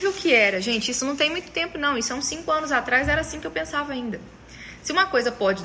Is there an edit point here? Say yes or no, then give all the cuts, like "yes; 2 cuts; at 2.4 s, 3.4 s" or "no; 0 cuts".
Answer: no; 0 cuts